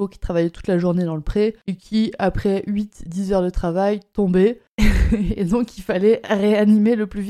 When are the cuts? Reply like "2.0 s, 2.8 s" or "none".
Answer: none

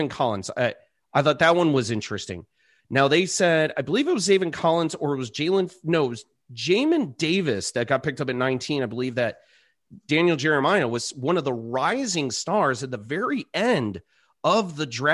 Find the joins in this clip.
none

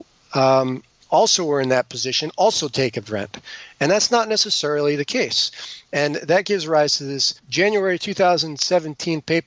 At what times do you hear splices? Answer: 7.4 s

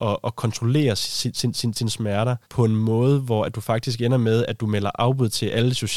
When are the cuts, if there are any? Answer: 2.4 s

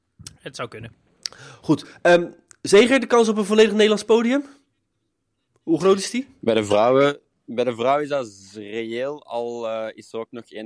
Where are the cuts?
none

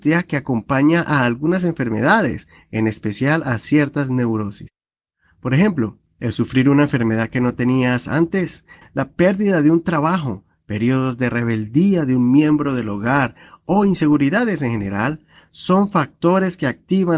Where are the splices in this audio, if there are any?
8.8 s

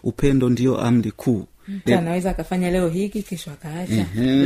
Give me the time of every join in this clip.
1.9 s

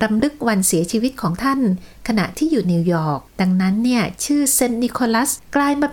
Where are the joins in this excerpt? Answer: 3.3 s

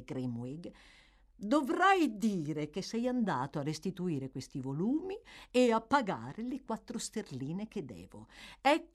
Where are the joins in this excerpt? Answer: none

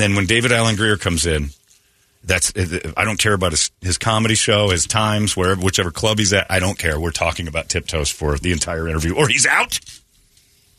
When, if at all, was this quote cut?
none

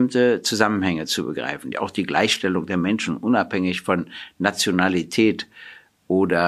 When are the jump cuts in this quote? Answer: 1.7 s

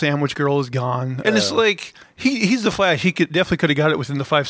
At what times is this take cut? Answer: 1.2 s

